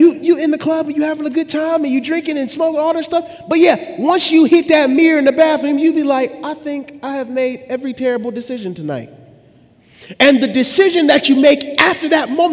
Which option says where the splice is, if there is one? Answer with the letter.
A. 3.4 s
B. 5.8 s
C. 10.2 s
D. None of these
D